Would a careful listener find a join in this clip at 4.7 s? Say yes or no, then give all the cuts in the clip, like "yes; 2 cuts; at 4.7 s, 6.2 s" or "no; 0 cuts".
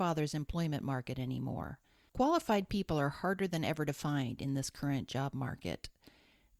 no; 1 cut; at 2.1 s